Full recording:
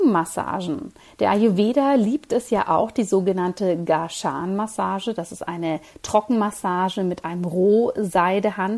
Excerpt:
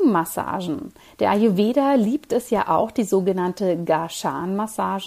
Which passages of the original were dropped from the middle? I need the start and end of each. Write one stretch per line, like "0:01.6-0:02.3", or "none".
none